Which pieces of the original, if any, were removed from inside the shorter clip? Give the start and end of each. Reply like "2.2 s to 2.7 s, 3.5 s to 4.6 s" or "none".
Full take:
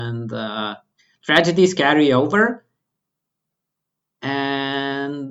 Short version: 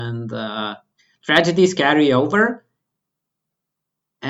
none

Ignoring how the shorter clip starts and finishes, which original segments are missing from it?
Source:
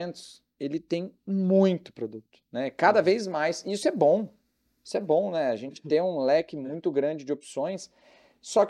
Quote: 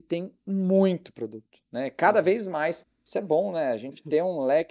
3.6 s to 4.6 s

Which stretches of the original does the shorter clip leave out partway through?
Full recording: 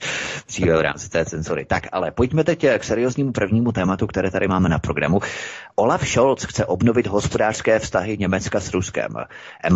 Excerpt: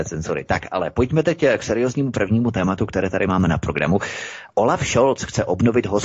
none

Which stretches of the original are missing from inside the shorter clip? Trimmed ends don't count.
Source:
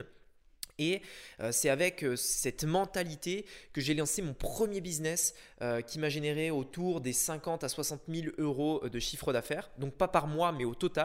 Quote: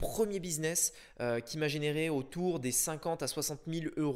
none

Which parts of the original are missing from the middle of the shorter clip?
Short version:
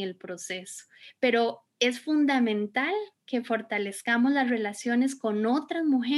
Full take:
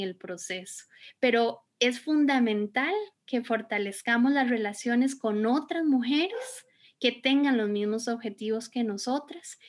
none

